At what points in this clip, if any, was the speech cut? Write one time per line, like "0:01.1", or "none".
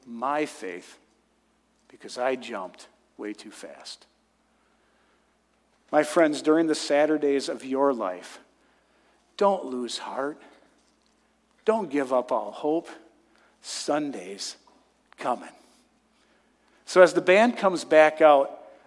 none